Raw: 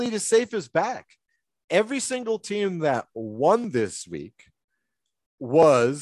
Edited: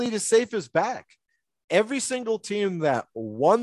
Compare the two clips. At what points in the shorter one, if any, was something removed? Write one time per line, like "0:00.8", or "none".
none